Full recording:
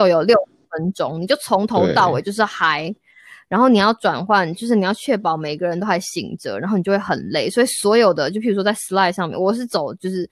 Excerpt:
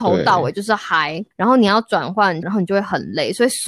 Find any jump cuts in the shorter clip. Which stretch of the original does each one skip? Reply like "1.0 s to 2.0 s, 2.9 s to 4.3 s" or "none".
3.0 s to 3.4 s, 4.5 s to 6.6 s